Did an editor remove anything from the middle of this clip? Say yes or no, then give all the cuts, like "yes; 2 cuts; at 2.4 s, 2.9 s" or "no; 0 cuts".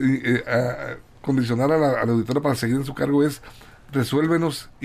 no; 0 cuts